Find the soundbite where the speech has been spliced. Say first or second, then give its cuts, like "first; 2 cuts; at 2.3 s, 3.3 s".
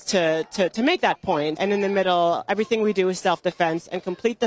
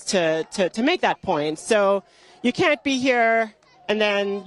first; 1 cut; at 1.6 s